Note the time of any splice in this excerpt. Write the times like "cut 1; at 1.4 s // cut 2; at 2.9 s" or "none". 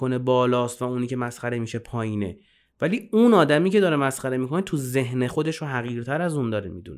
cut 1; at 5.3 s